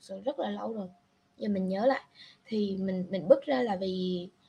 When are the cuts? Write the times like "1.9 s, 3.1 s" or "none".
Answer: none